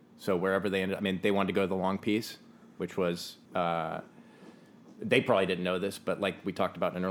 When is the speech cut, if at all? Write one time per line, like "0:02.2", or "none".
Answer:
0:03.4